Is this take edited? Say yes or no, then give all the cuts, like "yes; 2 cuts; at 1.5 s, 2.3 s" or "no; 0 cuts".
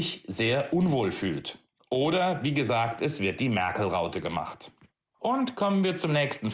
no; 0 cuts